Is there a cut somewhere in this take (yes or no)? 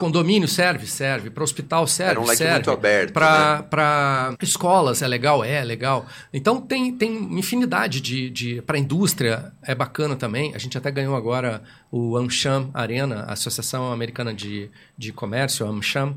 yes